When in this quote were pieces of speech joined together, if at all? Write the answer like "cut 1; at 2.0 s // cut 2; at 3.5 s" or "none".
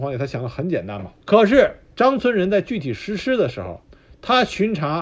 cut 1; at 1.2 s